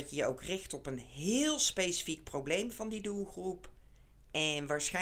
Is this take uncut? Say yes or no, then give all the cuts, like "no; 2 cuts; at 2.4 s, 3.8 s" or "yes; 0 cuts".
yes; 0 cuts